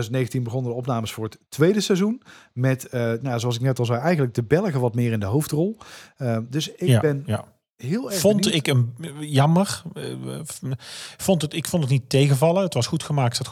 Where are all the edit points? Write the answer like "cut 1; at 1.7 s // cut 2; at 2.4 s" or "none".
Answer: none